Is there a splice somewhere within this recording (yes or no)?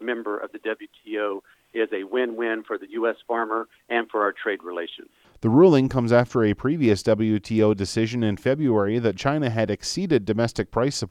no